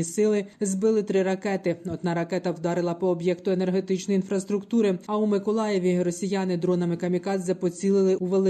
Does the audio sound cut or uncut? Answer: cut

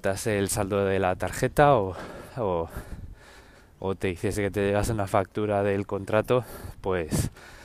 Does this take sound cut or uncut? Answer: uncut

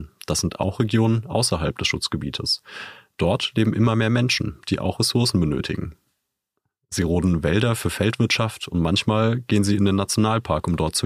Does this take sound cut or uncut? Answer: uncut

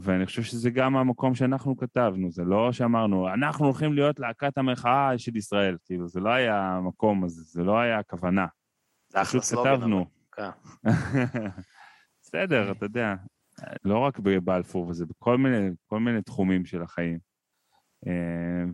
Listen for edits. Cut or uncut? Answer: cut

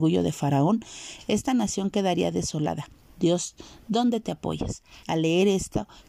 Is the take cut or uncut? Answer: cut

